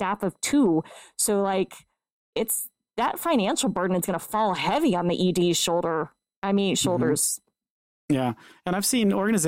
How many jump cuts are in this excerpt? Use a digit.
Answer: 0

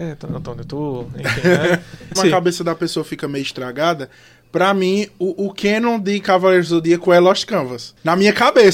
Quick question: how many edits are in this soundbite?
1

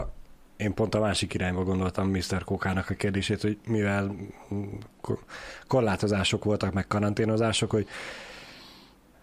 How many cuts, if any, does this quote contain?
0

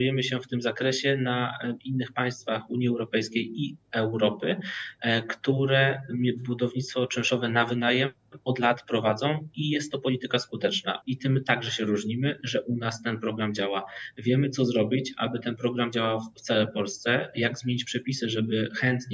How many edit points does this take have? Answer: 1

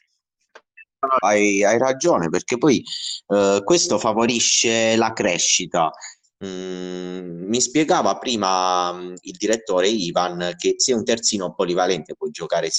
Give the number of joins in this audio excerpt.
2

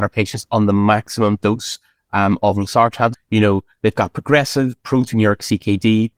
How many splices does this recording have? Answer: 1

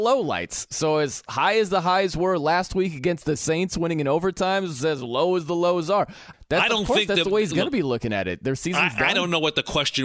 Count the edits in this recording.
1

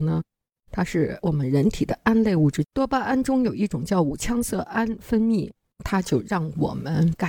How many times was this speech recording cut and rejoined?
1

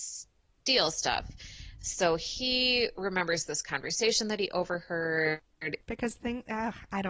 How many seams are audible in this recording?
1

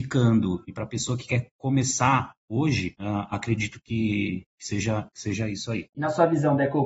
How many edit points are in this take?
1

